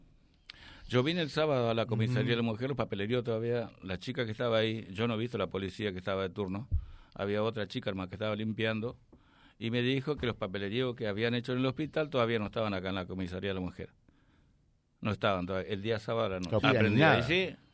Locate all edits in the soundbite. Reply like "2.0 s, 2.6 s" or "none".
16.6 s